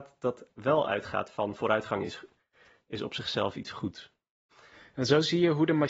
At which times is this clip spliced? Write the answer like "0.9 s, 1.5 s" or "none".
none